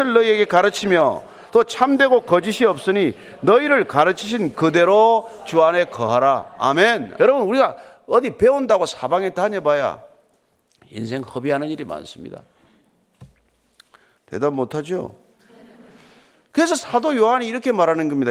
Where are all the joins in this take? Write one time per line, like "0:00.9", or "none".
0:07.2
0:14.2